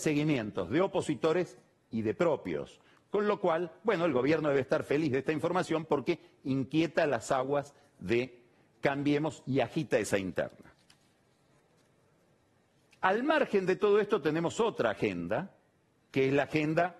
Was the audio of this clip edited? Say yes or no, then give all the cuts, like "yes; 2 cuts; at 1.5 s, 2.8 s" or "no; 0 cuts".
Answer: no; 0 cuts